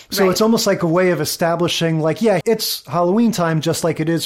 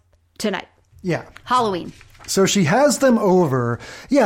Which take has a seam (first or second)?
first